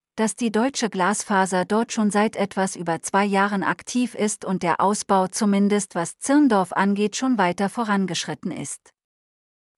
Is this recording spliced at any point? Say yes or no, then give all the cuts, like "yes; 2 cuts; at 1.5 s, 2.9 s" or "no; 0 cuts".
no; 0 cuts